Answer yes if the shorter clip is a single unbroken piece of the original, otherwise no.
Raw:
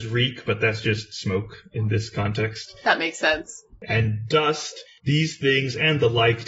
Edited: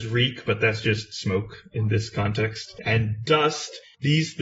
no